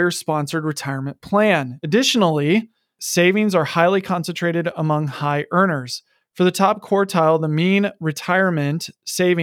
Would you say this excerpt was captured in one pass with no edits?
yes; 0 cuts

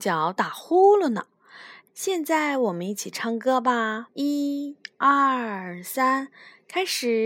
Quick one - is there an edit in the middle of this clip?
yes; 2 cuts; at 1.9 s, 4.1 s

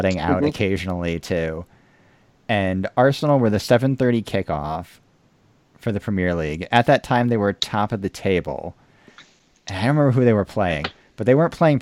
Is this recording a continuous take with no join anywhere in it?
yes; 0 cuts

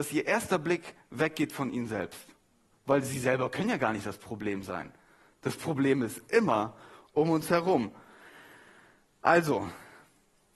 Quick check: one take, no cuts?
yes; 0 cuts

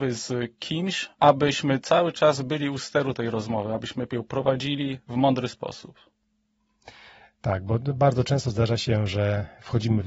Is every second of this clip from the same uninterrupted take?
no; 1 cut; at 1.1 s

